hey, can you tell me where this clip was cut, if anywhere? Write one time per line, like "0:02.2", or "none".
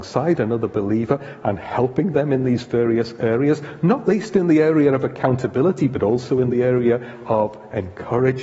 none